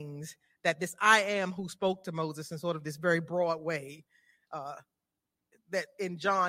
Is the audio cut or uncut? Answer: uncut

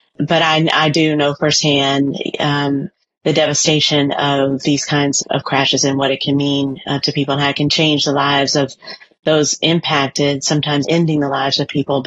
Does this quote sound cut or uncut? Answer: cut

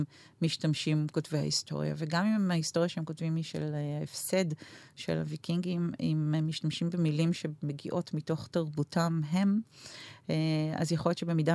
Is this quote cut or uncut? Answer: uncut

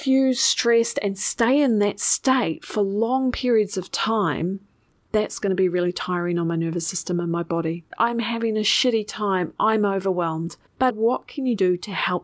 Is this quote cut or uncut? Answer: cut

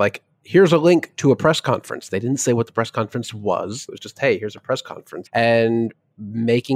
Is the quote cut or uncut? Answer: cut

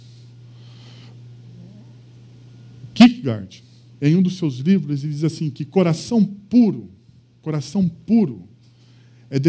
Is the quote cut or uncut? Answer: uncut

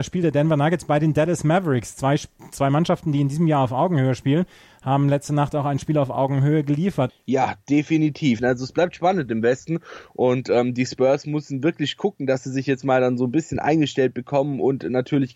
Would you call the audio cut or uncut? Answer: cut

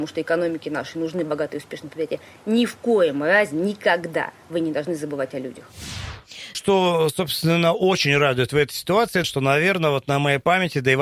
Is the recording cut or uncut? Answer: cut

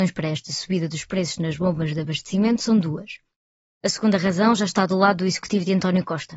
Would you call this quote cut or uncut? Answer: cut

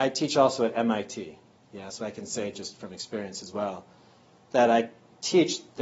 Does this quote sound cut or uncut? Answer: uncut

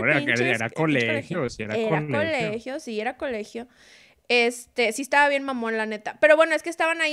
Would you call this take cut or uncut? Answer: uncut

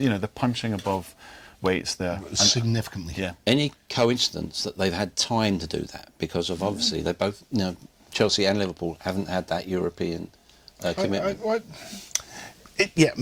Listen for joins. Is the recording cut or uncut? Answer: uncut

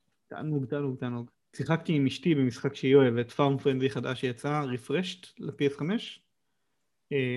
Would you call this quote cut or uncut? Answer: cut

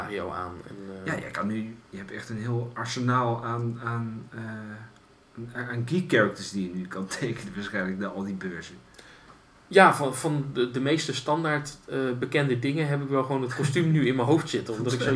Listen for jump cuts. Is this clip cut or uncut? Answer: uncut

